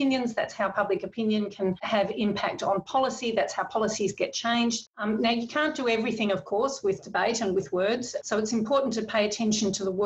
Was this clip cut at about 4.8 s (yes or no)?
yes